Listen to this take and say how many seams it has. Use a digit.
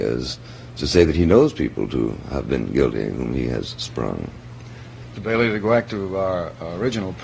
1